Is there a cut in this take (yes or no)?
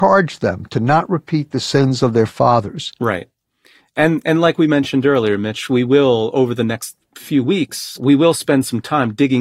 no